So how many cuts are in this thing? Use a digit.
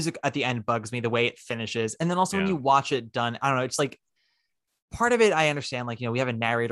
0